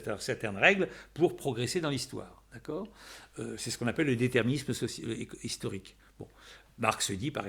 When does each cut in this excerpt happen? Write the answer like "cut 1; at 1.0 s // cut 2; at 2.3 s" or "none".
none